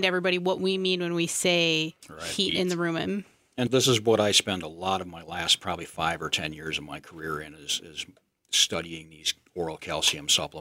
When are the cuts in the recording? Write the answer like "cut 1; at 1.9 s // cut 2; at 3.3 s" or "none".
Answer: cut 1; at 3.7 s